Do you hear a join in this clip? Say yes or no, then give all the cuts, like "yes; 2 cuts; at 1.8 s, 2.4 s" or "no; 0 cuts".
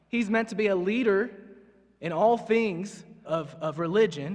yes; 1 cut; at 3.2 s